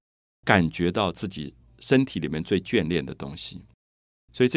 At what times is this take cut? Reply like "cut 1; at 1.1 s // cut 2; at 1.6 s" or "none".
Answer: none